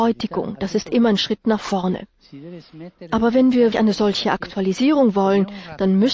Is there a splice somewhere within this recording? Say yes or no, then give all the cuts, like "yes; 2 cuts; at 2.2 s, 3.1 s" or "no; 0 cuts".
yes; 1 cut; at 3.7 s